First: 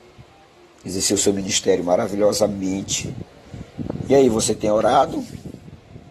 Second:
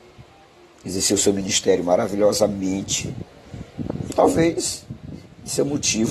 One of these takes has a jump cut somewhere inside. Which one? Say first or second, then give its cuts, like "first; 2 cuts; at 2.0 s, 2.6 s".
second; 1 cut; at 4.1 s